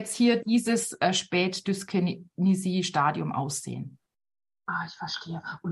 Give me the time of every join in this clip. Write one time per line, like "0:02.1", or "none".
none